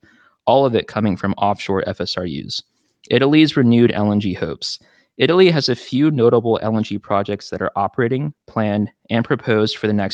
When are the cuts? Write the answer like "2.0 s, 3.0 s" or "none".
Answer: none